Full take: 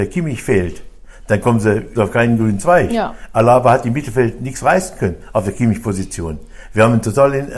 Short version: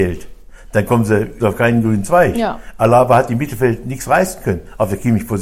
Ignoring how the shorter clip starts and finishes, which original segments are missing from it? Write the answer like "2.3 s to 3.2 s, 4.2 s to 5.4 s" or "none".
none

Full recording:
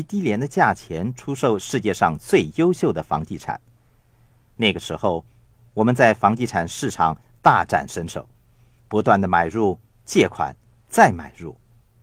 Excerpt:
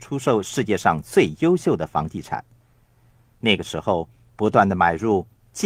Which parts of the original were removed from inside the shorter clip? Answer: 5.5 s to 8.8 s

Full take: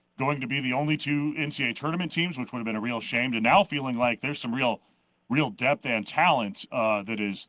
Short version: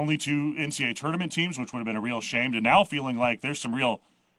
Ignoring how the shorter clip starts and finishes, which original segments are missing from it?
none

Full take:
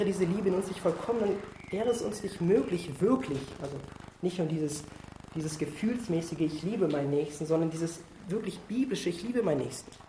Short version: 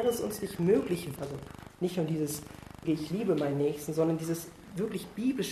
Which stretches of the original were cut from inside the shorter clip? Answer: 3.0 s to 3.6 s, 5.3 s to 6.4 s

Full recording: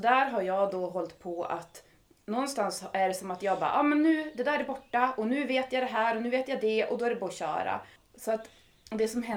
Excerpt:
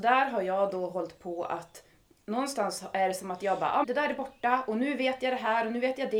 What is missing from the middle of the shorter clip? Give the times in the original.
3.8 s to 4.3 s

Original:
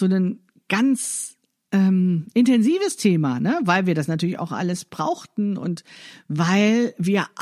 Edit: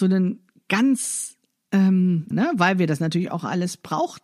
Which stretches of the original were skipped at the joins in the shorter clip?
2.3 s to 3.4 s

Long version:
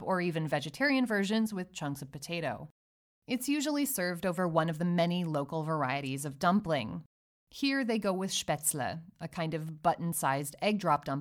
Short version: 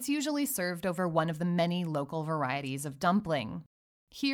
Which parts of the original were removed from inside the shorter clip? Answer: none

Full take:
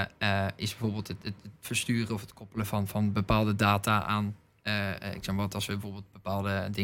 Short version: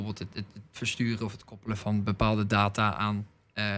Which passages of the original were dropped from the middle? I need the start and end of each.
2.7 s to 2.9 s

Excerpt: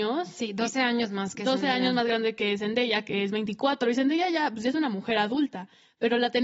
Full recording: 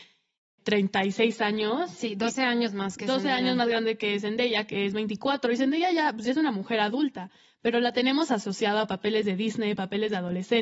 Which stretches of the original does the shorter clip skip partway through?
none

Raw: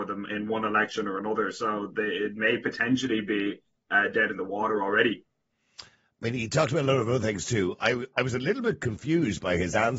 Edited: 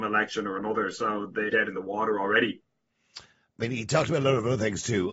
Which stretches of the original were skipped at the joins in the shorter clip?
2.1 s to 4.1 s

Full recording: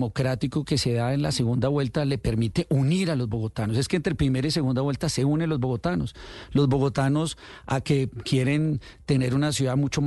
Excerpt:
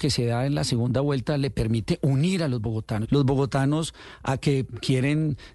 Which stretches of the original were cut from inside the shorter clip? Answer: 3.7 s to 6.5 s

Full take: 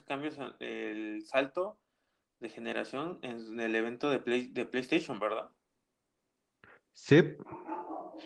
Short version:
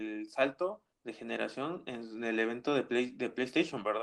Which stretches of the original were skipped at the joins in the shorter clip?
1.9 s to 2.3 s

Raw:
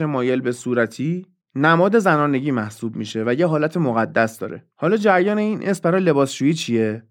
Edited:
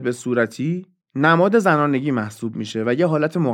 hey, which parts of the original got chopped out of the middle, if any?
none

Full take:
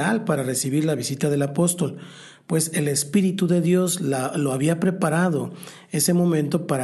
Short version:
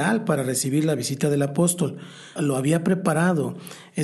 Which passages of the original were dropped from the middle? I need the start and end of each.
2.4 s to 4.3 s

